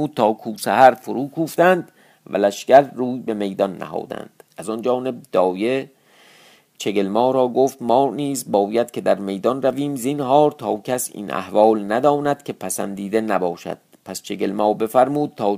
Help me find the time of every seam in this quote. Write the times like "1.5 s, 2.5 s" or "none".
4.5 s